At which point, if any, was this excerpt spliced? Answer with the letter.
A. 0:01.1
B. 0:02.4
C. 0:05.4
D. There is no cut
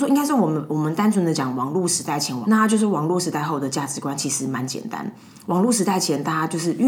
B